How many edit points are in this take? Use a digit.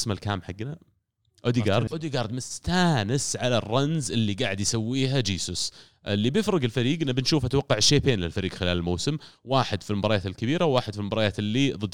1